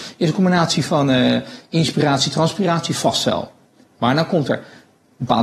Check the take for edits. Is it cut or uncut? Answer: uncut